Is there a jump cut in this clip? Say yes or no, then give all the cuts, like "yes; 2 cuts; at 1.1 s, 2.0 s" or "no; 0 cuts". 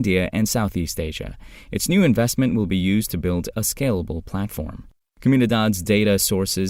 no; 0 cuts